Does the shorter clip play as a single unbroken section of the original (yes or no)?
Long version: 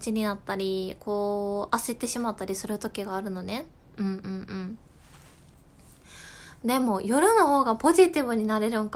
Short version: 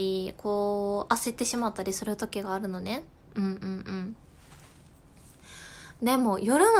yes